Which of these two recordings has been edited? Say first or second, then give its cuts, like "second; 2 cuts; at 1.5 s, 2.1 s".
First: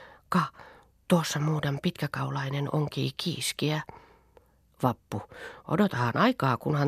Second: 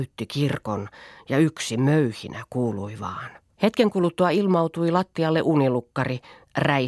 second; 1 cut; at 3.5 s